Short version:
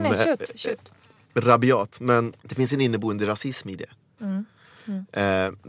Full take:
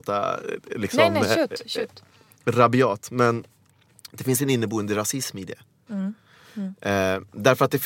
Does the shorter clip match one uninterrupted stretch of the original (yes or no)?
no